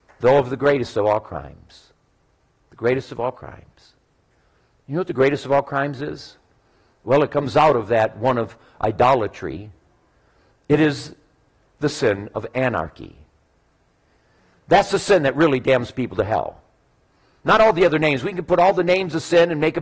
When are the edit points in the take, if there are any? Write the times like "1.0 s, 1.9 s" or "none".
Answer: none